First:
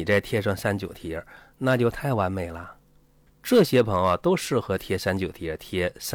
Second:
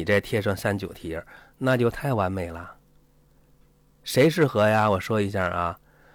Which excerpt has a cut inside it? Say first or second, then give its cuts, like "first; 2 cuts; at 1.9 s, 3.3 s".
first; 1 cut; at 3.3 s